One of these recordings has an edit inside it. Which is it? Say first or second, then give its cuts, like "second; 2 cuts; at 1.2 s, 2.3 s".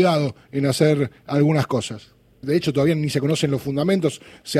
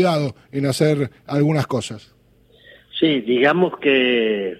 first; 1 cut; at 2.4 s